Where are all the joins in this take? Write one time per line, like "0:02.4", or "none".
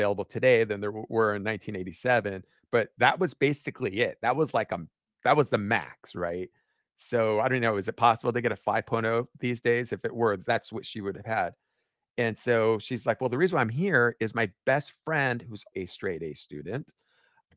0:15.7